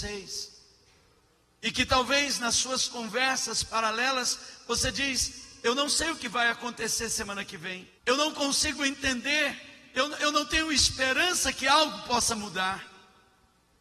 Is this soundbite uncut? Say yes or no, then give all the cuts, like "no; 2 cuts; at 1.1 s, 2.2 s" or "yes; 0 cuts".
no; 2 cuts; at 8.0 s, 10.2 s